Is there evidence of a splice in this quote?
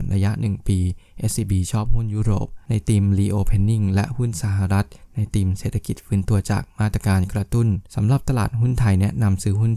yes; 1 cut; at 7.9 s

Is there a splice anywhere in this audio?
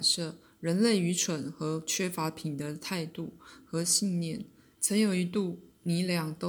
yes; 1 cut; at 4.7 s

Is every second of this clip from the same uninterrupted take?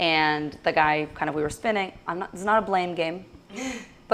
yes; 0 cuts

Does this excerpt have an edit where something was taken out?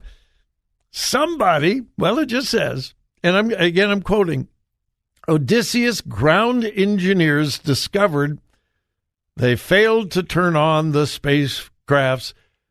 no; 0 cuts

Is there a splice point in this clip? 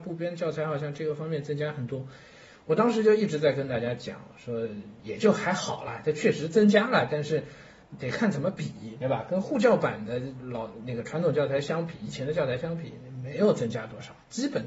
no; 0 cuts

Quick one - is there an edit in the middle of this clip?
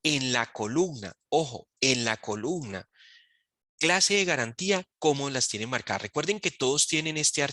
no; 0 cuts

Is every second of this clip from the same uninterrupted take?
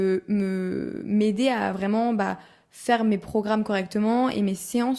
yes; 0 cuts

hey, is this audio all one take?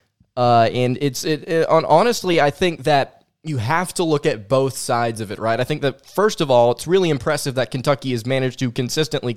yes; 0 cuts

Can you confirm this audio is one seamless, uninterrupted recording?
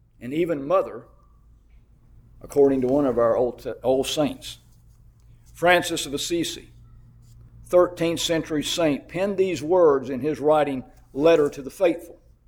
yes; 0 cuts

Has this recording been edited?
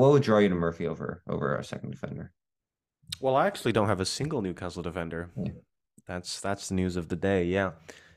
no; 0 cuts

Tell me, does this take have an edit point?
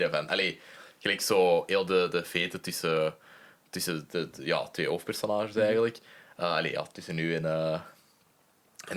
no; 0 cuts

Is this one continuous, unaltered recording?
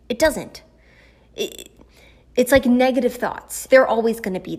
no; 1 cut; at 3.7 s

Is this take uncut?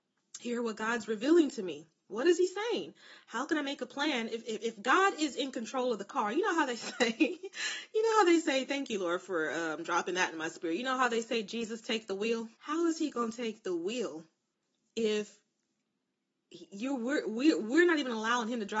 no; 1 cut; at 12.5 s

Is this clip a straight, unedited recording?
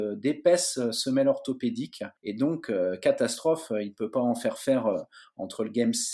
no; 1 cut; at 2.2 s

